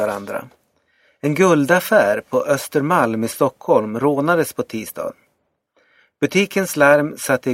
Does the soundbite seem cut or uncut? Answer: uncut